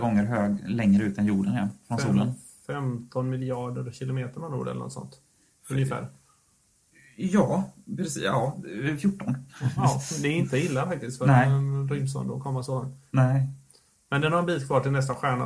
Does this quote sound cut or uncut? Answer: uncut